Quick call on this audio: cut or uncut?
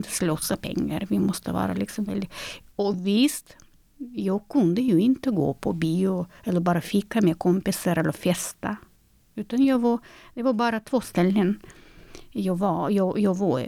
uncut